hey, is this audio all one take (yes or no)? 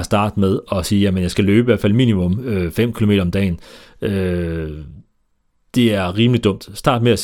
yes